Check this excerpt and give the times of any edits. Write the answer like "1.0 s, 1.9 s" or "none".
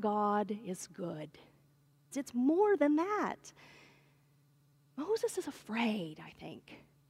2.1 s